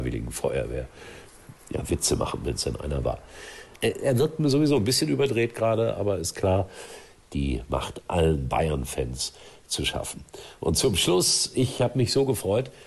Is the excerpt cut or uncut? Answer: cut